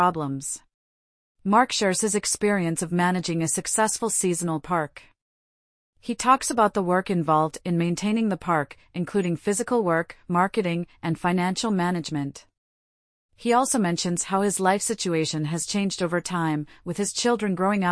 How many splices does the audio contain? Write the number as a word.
one